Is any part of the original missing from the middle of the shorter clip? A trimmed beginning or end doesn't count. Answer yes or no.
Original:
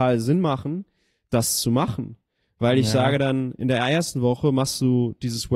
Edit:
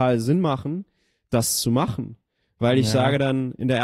no